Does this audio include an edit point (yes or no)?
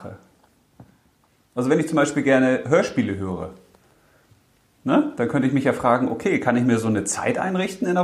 no